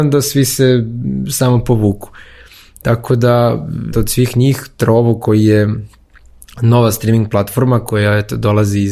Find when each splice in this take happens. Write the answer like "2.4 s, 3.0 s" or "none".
3.9 s